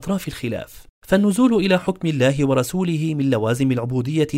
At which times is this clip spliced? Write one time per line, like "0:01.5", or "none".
0:01.0